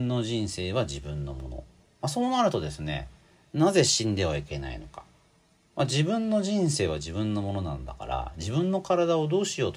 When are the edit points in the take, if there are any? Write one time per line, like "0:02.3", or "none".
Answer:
none